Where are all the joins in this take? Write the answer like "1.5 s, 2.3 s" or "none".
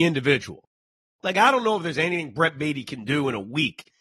none

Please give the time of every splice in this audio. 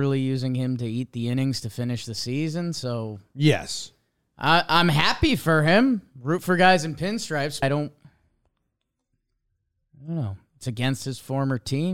7.6 s

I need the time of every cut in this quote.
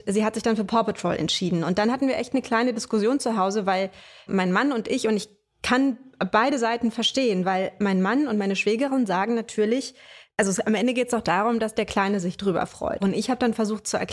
4.3 s, 13.0 s

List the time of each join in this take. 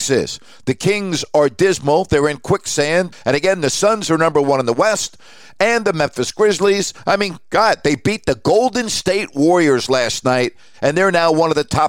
3.1 s

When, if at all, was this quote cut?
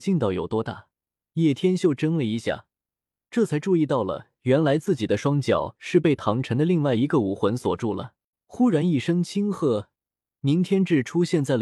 1.3 s, 8.3 s

